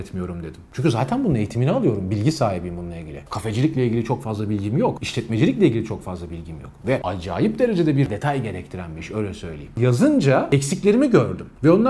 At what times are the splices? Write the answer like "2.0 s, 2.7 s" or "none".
none

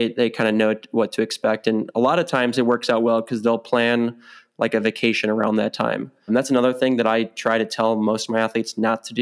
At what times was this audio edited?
6.3 s

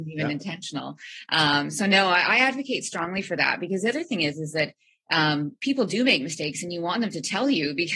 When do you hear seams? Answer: none

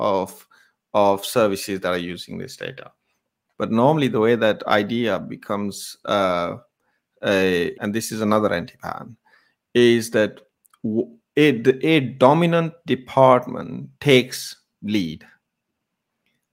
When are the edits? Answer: 3.5 s, 7.7 s, 13.9 s

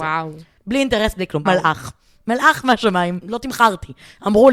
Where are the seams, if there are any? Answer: 1.5 s, 3.2 s

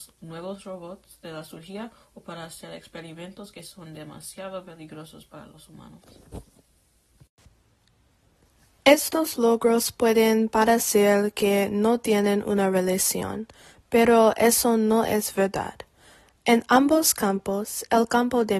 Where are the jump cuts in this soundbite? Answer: none

